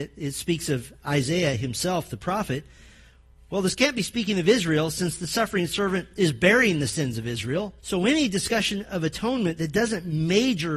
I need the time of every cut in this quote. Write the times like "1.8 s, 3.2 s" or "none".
7.8 s